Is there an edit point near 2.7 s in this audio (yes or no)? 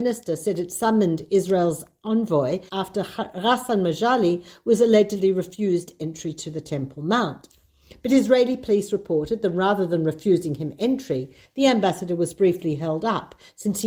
yes